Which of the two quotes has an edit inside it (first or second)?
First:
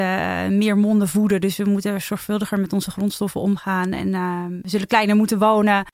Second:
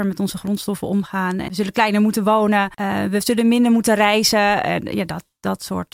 second